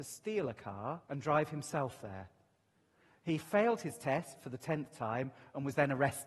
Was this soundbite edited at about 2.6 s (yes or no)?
no